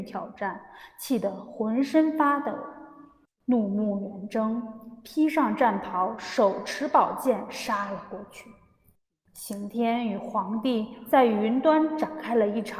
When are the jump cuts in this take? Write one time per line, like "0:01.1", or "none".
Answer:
none